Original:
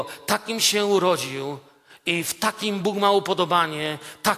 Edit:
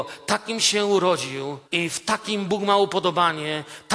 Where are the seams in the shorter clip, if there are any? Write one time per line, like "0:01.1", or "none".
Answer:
0:01.6